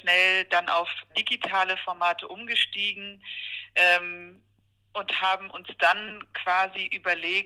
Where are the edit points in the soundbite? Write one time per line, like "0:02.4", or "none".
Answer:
0:01.1